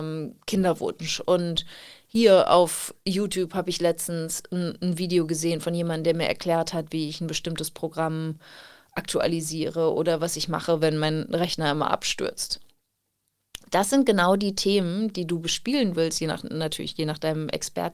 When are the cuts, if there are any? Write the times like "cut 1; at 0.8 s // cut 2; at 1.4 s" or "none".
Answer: none